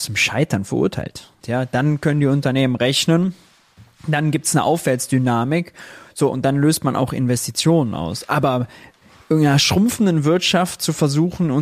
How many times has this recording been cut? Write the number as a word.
one